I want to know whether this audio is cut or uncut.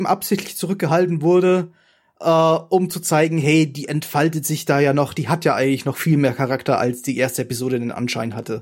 uncut